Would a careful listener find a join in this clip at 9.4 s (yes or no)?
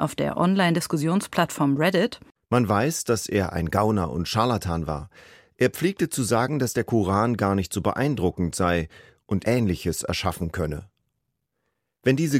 yes